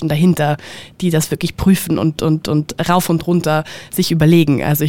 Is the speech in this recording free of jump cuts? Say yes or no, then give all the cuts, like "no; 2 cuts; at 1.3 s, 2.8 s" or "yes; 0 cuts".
yes; 0 cuts